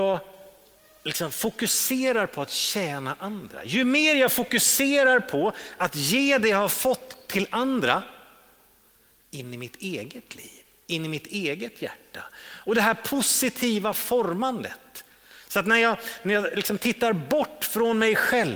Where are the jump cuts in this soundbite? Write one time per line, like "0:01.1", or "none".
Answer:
0:09.2